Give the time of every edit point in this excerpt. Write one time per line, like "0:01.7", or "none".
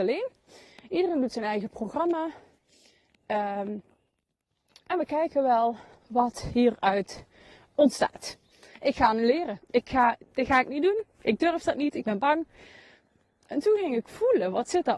0:08.8